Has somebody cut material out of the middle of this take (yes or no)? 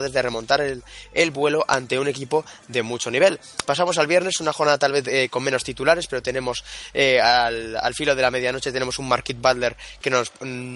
no